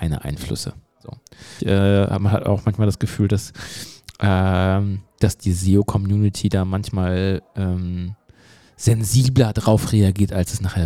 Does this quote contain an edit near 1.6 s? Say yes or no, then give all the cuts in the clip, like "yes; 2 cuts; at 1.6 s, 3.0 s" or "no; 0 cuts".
yes; 1 cut; at 1.6 s